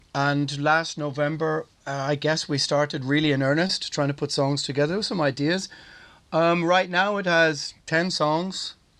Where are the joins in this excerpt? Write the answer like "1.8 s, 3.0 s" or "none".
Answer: none